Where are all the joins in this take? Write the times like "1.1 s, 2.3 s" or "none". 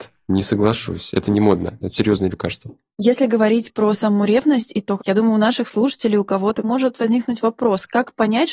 1.8 s, 5.0 s, 6.6 s